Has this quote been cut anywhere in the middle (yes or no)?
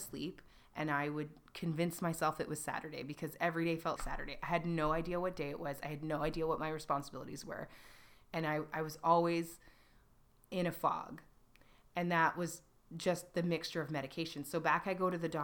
yes